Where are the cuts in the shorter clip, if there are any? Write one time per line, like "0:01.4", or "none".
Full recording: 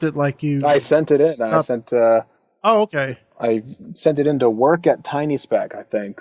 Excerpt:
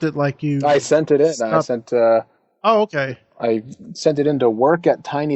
none